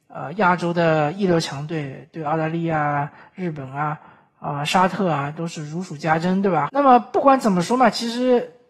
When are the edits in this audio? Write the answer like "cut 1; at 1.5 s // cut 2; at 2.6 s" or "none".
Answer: cut 1; at 6.7 s